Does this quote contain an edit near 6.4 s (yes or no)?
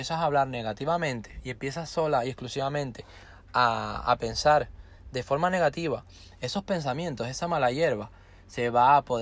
no